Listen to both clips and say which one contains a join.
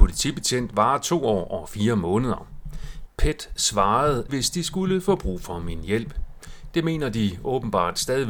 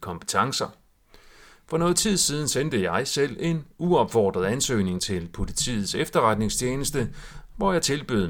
first; 2 cuts; at 3.1 s, 4.3 s

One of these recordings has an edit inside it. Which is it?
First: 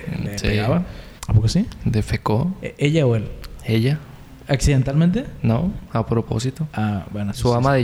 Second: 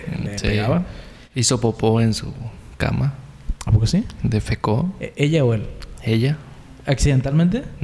first; 1 cut; at 1.2 s

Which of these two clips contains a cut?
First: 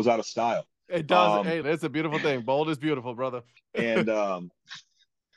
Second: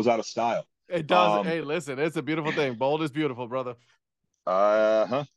first; 2 cuts; at 1.6 s, 3.6 s

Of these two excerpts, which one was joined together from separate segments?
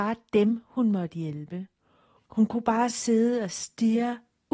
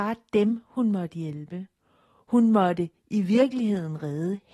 first; 1 cut; at 2.2 s

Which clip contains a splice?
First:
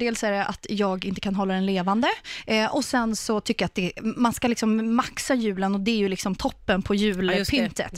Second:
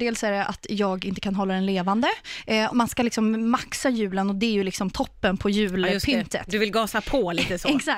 second; 1 cut; at 2.7 s

